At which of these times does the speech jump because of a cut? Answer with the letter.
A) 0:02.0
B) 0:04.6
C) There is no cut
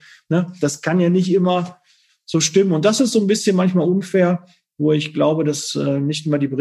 C